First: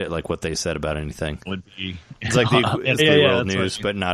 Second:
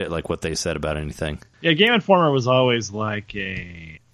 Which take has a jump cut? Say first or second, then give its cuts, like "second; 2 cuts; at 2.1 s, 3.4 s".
first; 2 cuts; at 1.4 s, 3.0 s